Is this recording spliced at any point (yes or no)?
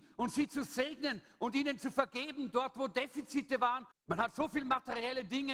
yes